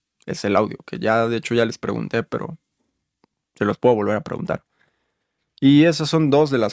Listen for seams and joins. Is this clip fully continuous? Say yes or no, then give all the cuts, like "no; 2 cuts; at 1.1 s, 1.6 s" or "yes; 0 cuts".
yes; 0 cuts